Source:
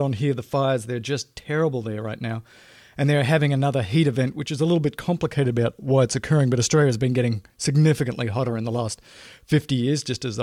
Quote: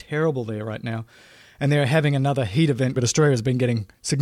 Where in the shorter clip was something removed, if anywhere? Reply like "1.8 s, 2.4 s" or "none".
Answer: 3.0 s